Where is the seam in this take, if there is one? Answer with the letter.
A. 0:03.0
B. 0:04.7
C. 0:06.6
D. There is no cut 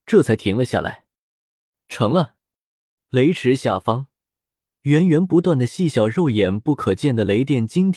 A